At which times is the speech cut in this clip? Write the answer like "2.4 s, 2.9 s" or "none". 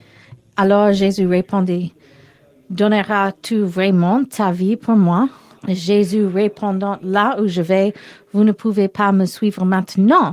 5.6 s

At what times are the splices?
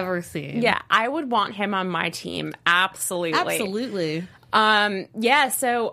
none

